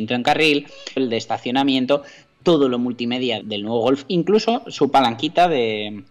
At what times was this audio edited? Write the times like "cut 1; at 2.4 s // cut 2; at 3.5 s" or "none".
cut 1; at 1.0 s // cut 2; at 3.4 s